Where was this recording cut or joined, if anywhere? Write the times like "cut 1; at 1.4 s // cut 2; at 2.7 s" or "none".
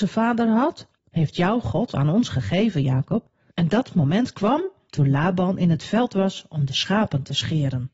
cut 1; at 1.0 s // cut 2; at 3.5 s

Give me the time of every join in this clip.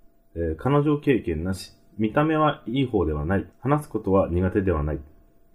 cut 1; at 3.5 s

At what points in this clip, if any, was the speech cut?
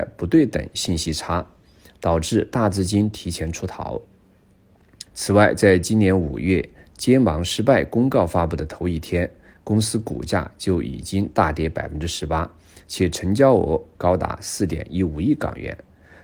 cut 1; at 5.1 s

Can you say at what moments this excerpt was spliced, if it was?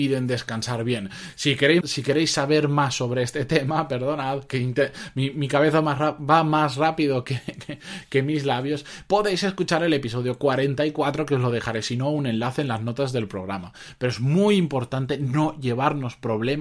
cut 1; at 1.8 s

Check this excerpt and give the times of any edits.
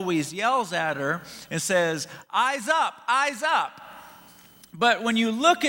cut 1; at 4.6 s

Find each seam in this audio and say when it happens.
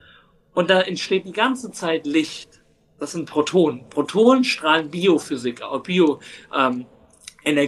none

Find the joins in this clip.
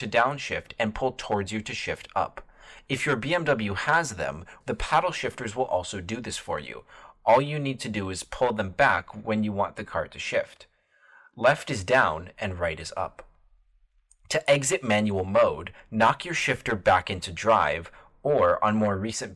cut 1; at 4.6 s

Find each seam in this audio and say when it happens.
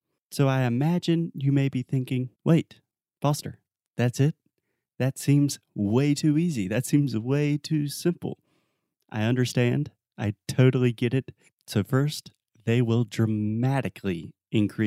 cut 1; at 2.3 s // cut 2; at 11.5 s

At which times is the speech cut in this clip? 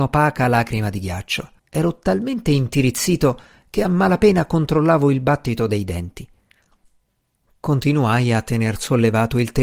cut 1; at 1.6 s

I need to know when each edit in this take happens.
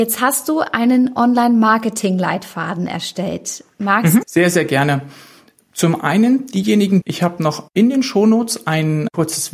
cut 1; at 4.2 s // cut 2; at 7.0 s

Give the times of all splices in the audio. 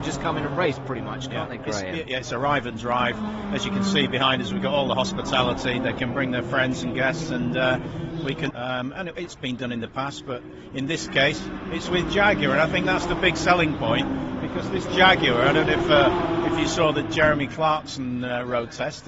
cut 1; at 8.5 s

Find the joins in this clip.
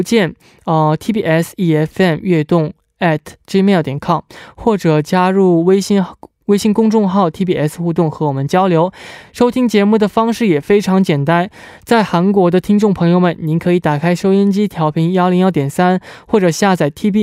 none

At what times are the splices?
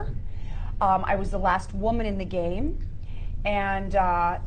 none

